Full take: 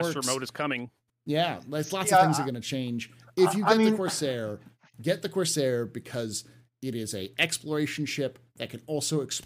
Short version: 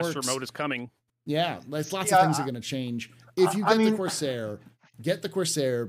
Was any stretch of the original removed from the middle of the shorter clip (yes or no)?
no